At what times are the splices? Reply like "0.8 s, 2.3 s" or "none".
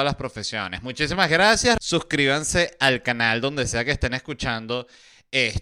1.8 s